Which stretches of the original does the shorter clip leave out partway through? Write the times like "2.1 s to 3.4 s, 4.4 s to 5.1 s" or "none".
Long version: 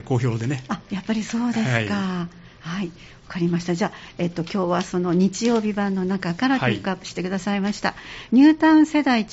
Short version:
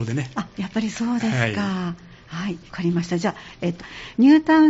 3.0 s to 3.2 s, 4.3 s to 7.9 s